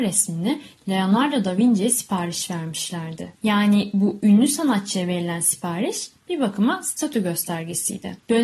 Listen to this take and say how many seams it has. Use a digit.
1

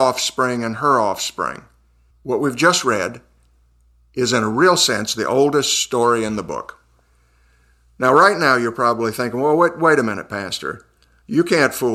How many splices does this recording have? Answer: 1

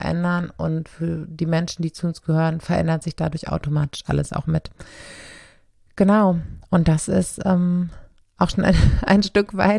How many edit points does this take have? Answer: 0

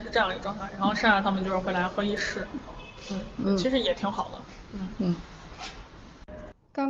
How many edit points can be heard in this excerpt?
0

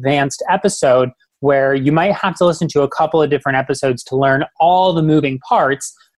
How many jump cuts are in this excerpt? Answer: 0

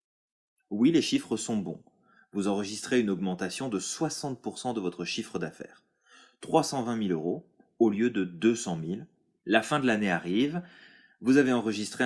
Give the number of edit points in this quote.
1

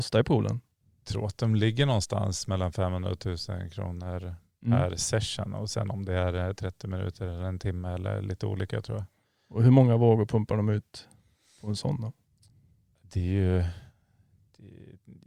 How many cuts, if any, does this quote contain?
0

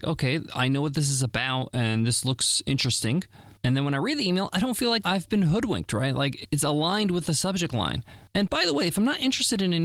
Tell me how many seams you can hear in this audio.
2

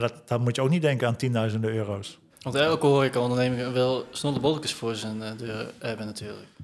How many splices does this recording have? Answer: 1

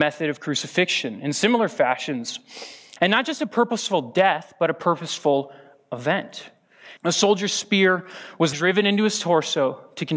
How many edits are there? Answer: 3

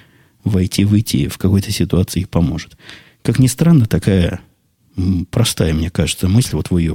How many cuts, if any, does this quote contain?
0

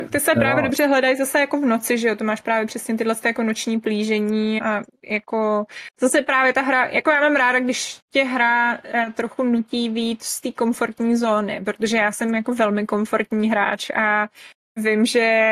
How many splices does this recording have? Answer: 1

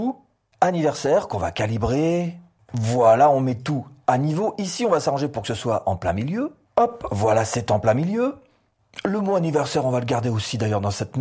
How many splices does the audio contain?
0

